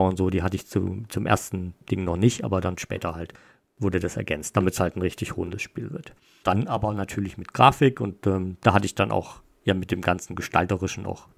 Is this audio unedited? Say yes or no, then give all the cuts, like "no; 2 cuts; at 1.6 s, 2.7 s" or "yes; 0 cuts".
no; 1 cut; at 6.4 s